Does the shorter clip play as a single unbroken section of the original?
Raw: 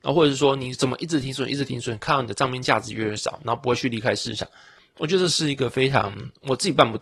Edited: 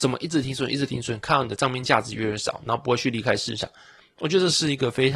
yes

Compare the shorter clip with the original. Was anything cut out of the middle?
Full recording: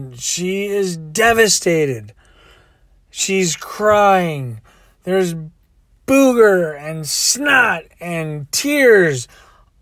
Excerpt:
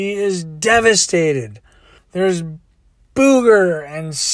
yes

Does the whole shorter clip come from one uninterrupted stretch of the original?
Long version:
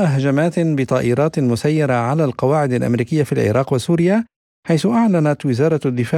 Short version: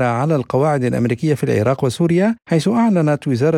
no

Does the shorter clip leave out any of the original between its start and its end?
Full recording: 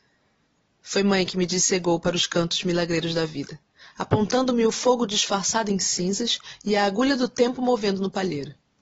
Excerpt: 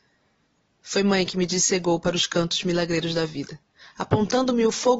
no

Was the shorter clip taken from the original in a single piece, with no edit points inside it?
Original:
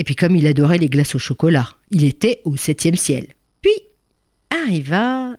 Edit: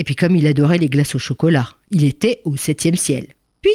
yes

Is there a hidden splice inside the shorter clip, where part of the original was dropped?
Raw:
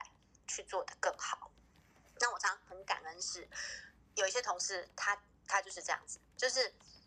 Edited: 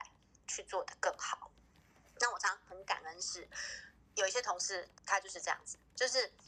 yes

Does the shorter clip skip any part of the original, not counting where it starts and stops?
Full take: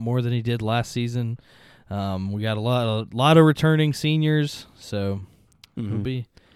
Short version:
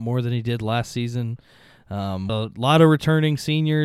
yes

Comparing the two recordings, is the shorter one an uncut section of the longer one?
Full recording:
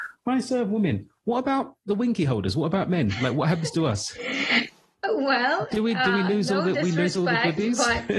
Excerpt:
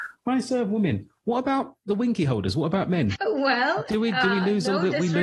no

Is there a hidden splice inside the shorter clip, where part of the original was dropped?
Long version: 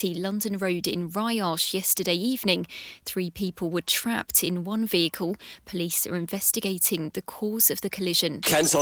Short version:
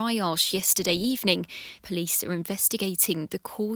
yes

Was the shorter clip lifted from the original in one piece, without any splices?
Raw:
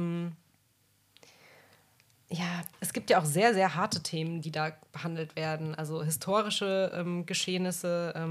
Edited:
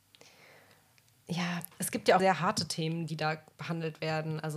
no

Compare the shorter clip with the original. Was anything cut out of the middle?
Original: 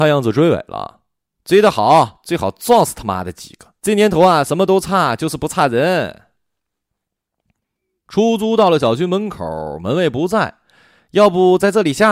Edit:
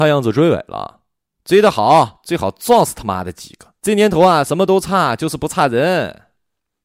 no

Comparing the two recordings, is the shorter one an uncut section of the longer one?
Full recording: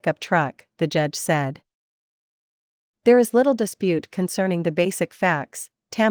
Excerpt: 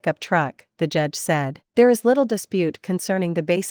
no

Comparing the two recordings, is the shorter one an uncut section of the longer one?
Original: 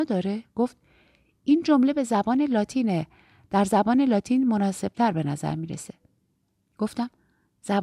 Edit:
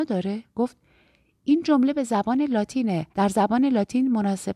no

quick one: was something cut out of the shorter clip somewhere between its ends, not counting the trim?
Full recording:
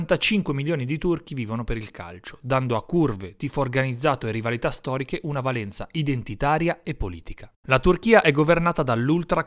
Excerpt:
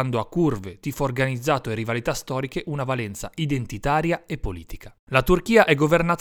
no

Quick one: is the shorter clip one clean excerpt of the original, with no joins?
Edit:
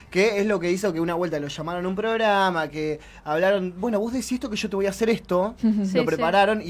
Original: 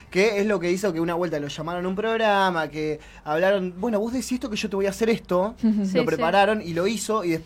yes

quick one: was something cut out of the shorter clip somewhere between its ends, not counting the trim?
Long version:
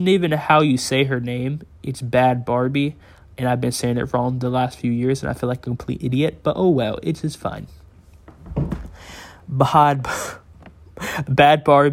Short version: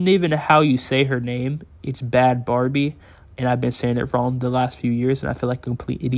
no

